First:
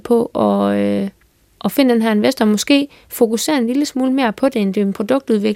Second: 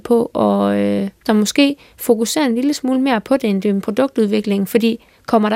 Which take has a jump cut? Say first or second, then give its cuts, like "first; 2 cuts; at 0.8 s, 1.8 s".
second; 1 cut; at 1.3 s